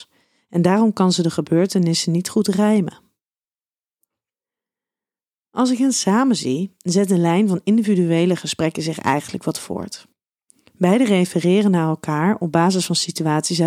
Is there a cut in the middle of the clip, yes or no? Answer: no